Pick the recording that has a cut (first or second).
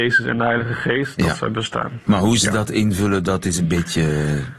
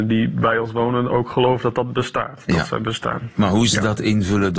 first